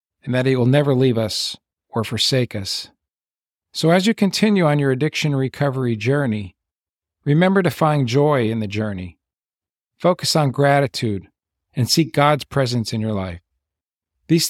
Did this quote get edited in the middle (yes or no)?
yes